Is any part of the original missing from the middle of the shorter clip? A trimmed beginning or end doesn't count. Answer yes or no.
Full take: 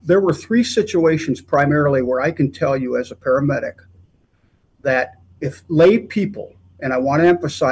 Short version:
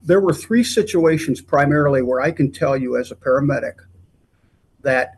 no